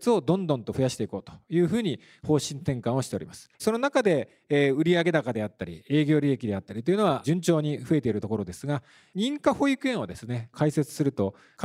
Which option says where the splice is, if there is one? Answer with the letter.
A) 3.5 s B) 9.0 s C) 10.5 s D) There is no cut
A